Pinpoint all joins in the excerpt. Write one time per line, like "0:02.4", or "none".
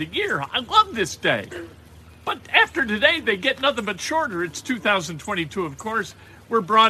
none